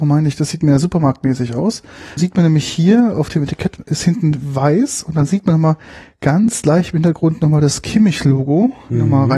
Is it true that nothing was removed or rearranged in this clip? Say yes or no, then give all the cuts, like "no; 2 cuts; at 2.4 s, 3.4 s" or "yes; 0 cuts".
no; 1 cut; at 2.2 s